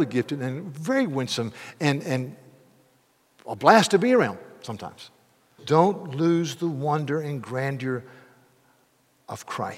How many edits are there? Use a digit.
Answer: 1